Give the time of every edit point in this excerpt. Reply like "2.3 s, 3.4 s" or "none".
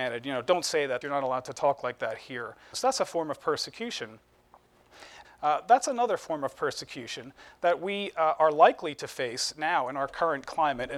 1.0 s, 2.7 s, 5.2 s

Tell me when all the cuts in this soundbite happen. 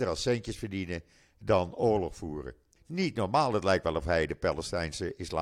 2.8 s

